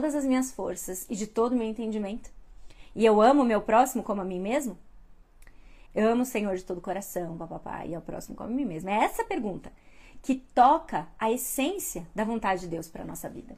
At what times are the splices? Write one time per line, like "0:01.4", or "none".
0:05.9